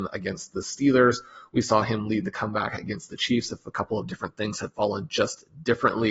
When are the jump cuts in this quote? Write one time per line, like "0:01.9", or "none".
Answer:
none